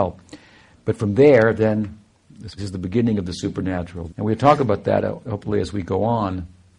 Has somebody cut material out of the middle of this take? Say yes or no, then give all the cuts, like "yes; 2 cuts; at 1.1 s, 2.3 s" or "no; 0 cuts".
yes; 2 cuts; at 2.6 s, 4.1 s